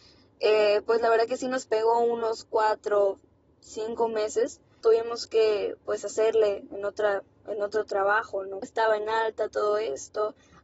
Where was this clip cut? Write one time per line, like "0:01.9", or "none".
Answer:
0:04.8
0:08.6